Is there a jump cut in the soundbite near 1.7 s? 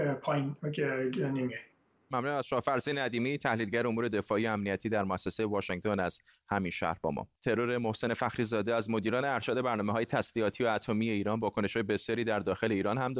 no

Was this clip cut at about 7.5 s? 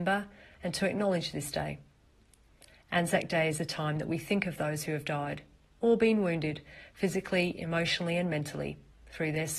no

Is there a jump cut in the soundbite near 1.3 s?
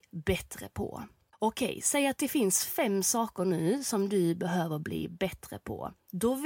yes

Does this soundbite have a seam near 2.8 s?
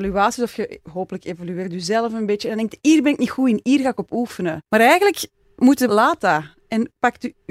no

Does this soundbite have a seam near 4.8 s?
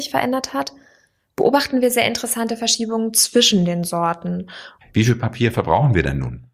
yes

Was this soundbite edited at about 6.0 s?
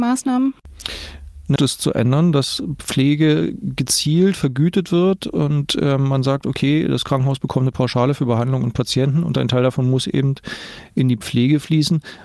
no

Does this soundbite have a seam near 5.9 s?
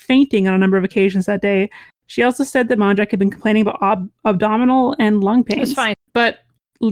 yes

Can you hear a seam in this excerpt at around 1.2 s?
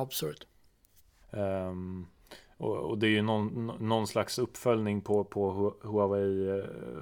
yes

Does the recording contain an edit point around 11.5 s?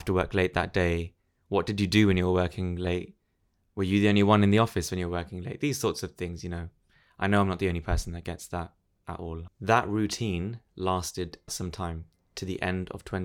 yes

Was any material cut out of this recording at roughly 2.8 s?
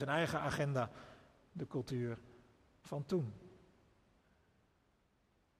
no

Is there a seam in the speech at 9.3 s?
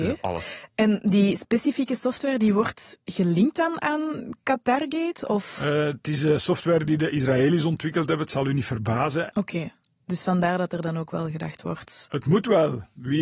yes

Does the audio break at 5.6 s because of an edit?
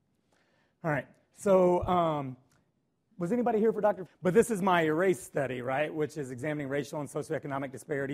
no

